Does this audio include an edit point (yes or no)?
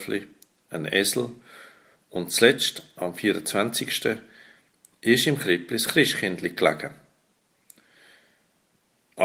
no